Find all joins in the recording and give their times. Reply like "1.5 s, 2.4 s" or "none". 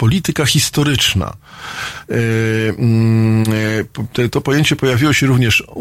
2.0 s